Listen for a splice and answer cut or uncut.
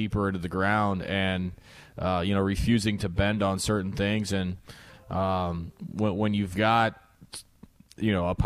uncut